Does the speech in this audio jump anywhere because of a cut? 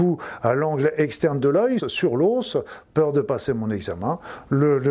yes; 1 cut; at 1.8 s

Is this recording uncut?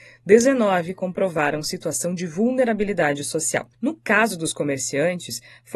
no; 1 cut; at 3.7 s

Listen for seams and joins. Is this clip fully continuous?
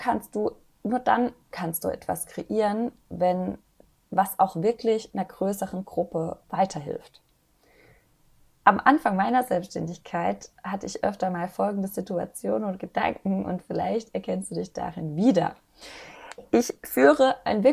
yes; 0 cuts

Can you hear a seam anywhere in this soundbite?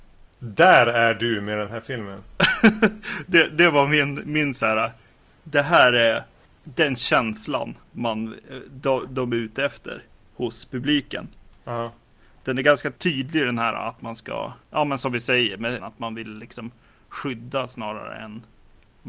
yes; 2 cuts; at 14.6 s, 15.8 s

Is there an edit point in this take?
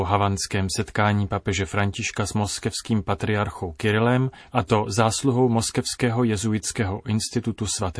yes; 1 cut; at 4.5 s

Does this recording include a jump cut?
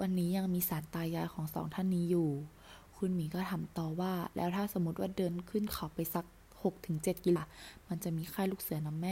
yes; 1 cut; at 7.4 s

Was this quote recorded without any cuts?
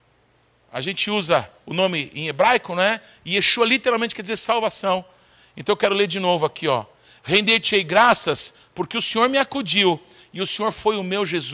yes; 0 cuts

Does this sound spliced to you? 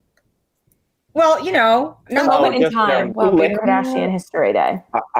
yes; 2 cuts; at 2.1 s, 3.1 s

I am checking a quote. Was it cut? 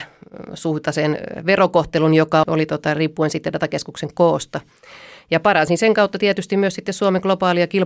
yes; 1 cut; at 2.4 s

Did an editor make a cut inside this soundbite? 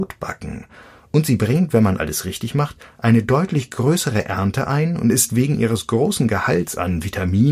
no; 0 cuts

